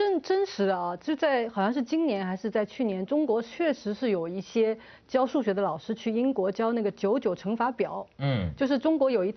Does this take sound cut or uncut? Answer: uncut